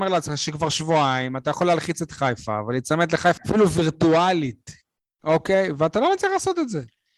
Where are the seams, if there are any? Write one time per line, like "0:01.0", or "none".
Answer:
0:03.4

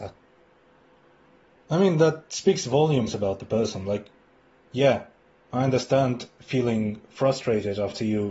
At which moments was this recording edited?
0:04.6

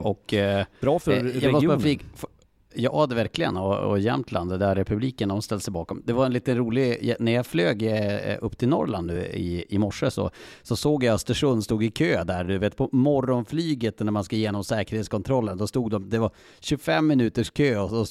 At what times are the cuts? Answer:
none

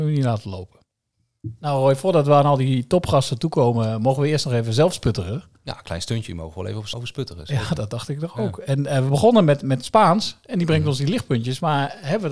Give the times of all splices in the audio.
0:06.9

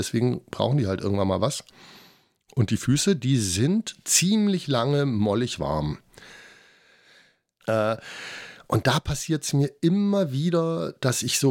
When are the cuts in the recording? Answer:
0:07.6

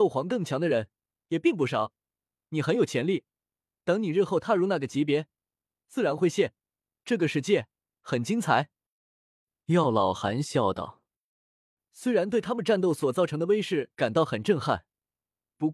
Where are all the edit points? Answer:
none

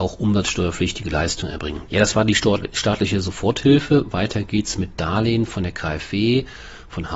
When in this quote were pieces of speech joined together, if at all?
0:01.9

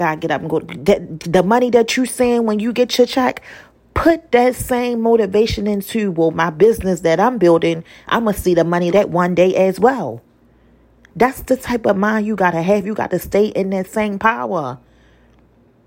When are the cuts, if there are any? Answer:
0:08.9

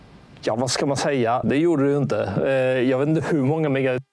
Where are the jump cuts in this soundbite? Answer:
0:01.4

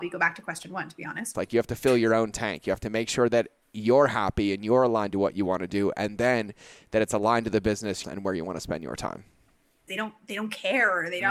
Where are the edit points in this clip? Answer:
0:01.3
0:08.0
0:09.9

